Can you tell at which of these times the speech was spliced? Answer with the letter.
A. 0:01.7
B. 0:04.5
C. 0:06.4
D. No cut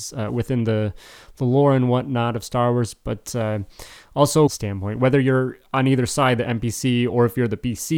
B